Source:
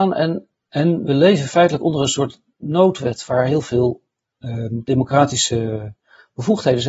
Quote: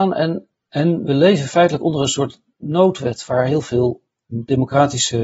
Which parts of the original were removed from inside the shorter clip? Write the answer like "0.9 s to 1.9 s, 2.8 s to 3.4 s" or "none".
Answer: 4.3 s to 4.7 s